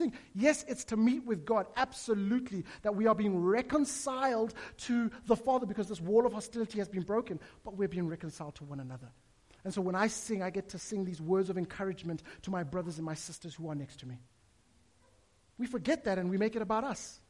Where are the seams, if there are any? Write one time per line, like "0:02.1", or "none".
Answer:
none